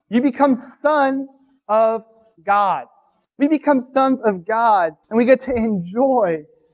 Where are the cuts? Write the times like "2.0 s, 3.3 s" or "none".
3.2 s, 5.0 s